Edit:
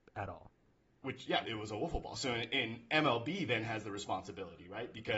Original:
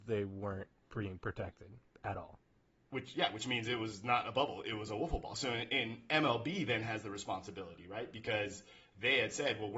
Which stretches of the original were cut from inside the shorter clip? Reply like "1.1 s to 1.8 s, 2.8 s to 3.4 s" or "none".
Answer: 3.3 s to 4.6 s